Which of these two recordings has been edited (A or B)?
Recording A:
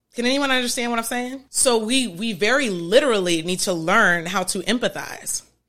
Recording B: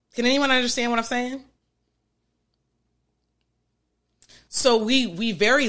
A